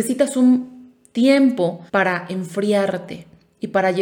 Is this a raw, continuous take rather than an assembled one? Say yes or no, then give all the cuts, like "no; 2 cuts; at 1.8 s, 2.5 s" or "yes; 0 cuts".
no; 1 cut; at 1.9 s